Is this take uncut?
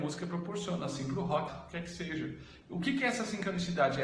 no; 2 cuts; at 1.5 s, 2.6 s

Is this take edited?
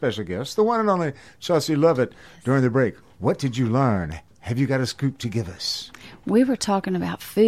no; 0 cuts

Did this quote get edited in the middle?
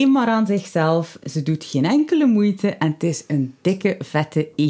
no; 0 cuts

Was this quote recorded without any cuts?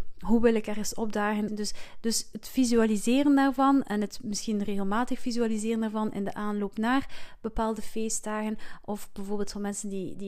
no; 1 cut; at 1.5 s

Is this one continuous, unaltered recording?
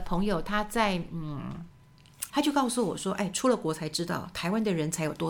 no; 1 cut; at 2.3 s

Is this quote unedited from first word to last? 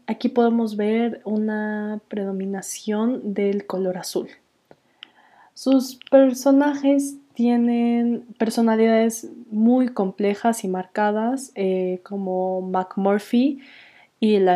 yes; 0 cuts

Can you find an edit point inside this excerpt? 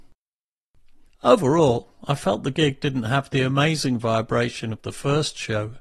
yes; 1 cut; at 1.1 s

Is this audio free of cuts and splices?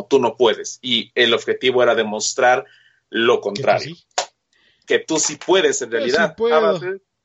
yes; 0 cuts

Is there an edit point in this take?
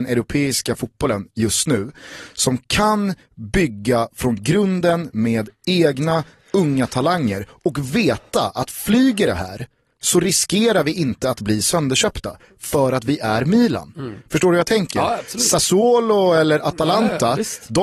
no; 0 cuts

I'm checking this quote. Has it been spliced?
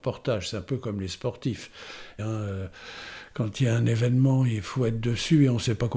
yes; 1 cut; at 2.2 s

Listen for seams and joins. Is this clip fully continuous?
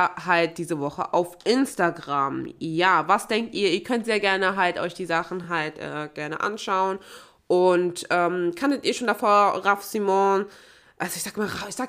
yes; 0 cuts

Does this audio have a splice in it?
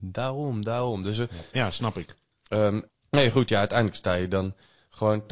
yes; 2 cuts; at 1.5 s, 2.9 s

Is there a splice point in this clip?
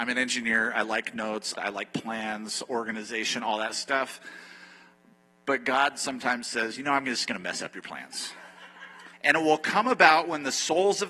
yes; 2 cuts; at 1.6 s, 9.1 s

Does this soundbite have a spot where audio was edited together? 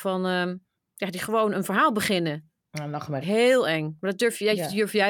yes; 1 cut; at 3.2 s

